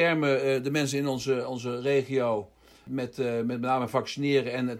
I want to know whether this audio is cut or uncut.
uncut